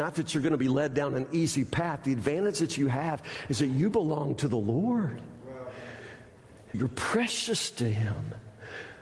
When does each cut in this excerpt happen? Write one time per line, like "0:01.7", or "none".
0:06.7